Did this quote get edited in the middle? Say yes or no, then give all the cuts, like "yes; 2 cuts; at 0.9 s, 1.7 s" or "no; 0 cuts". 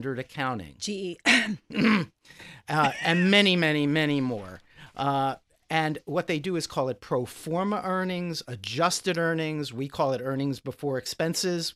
no; 0 cuts